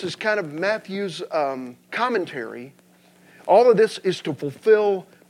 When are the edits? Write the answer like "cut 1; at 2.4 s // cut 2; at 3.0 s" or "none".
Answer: cut 1; at 1.9 s